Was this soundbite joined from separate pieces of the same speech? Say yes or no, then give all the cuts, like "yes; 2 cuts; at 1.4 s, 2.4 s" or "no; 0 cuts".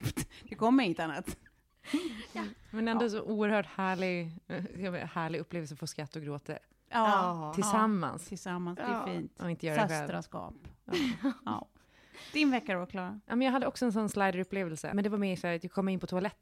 no; 0 cuts